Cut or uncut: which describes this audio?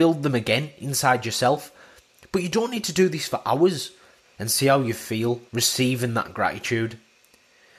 cut